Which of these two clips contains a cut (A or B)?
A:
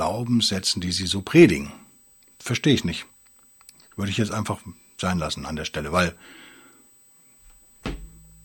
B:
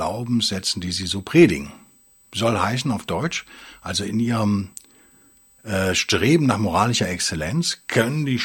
B